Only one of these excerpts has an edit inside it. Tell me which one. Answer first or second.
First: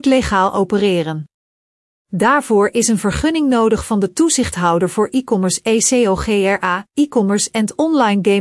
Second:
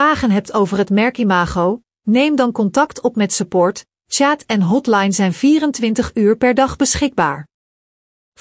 second